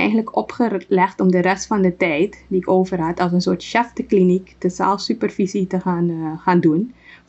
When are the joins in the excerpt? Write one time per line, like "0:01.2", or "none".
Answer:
none